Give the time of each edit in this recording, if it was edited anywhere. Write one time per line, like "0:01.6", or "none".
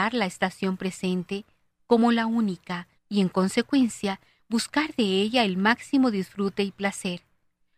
0:03.0